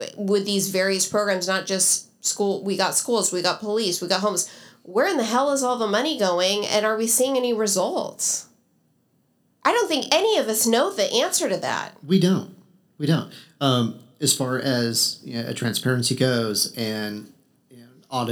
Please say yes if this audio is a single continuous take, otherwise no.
yes